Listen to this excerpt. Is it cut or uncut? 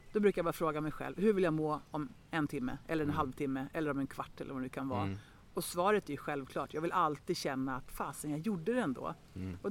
uncut